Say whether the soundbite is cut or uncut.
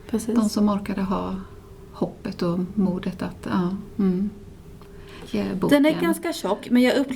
cut